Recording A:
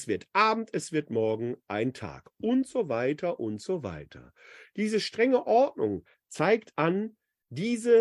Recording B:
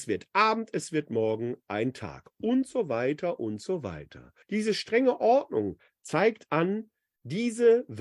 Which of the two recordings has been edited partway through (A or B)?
B